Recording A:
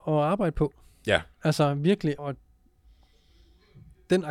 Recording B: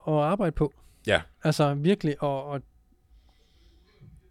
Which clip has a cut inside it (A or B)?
A